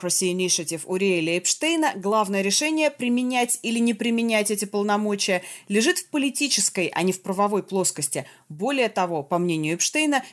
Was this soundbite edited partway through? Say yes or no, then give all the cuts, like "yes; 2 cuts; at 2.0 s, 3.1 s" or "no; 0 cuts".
no; 0 cuts